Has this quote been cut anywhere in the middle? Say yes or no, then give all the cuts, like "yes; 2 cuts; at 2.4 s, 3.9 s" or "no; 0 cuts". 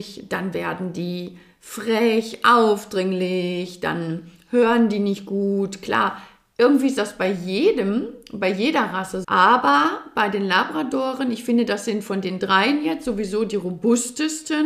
yes; 1 cut; at 9.2 s